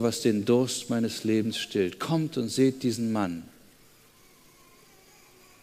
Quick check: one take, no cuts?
yes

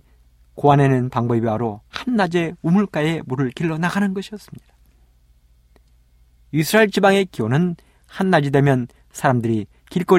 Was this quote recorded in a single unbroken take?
yes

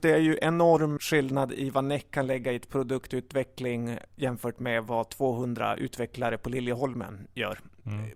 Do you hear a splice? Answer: yes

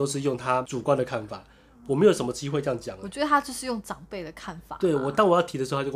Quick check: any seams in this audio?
no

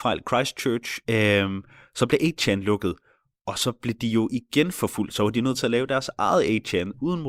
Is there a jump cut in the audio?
yes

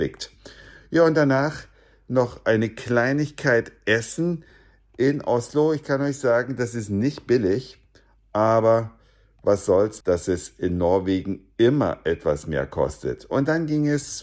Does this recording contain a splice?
yes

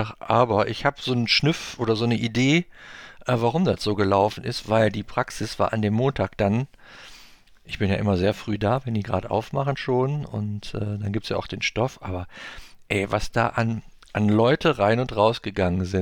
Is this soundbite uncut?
yes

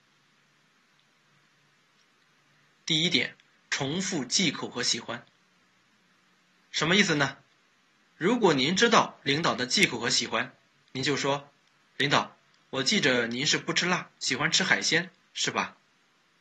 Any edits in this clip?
no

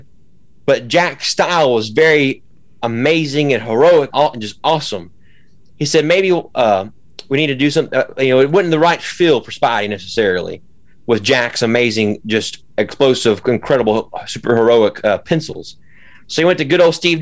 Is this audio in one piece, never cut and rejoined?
no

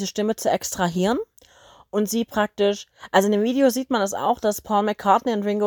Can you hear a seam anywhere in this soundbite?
no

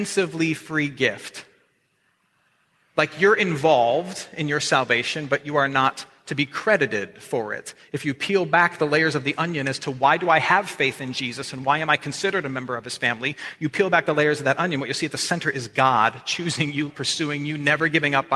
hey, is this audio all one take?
no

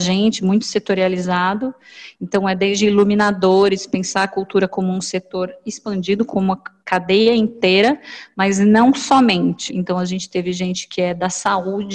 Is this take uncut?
no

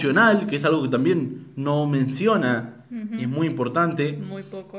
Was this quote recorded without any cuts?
yes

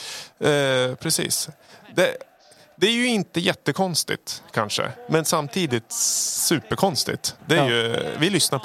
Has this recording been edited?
yes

